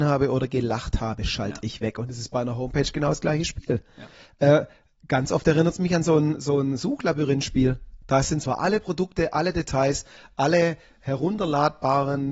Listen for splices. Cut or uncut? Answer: uncut